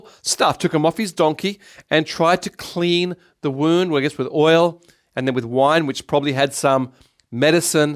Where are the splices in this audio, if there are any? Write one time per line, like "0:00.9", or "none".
none